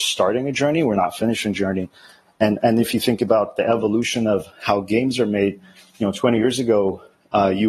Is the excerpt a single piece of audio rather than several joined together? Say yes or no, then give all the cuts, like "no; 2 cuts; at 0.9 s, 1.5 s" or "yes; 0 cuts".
yes; 0 cuts